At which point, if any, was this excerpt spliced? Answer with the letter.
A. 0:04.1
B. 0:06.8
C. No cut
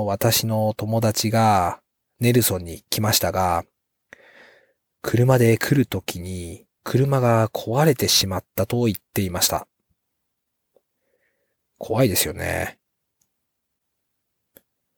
B